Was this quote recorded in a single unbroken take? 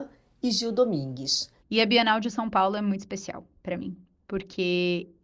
no; 1 cut; at 1.6 s

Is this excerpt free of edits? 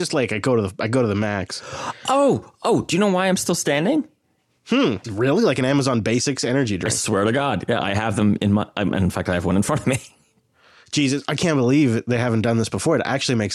no; 1 cut; at 5.0 s

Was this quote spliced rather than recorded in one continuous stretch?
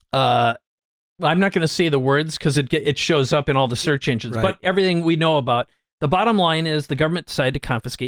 no; 0 cuts

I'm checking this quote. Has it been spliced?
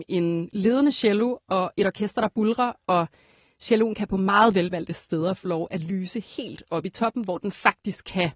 no; 0 cuts

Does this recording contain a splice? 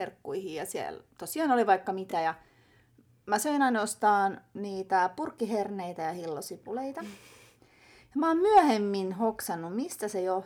no; 0 cuts

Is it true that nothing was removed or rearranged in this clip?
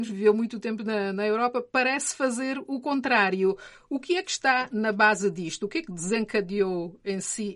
yes; 0 cuts

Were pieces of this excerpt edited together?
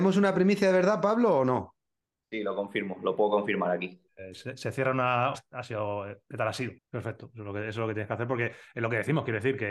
yes; 3 cuts; at 4.1 s, 5.3 s, 6.8 s

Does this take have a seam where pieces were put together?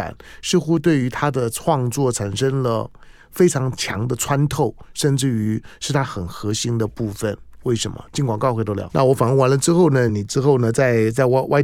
yes; 2 cuts; at 8.9 s, 10.1 s

